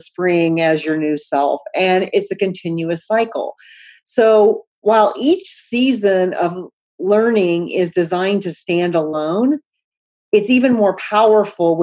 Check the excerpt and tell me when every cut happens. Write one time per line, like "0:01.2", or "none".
none